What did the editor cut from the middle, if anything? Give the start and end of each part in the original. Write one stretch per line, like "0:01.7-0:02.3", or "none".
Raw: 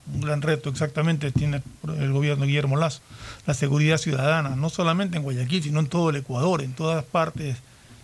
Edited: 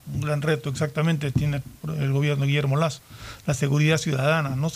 none